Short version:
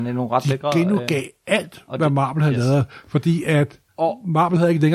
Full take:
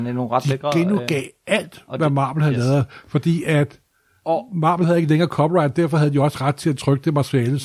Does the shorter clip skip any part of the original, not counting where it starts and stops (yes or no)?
yes